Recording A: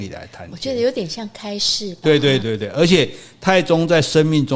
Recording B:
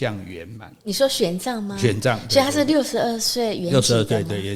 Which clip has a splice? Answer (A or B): A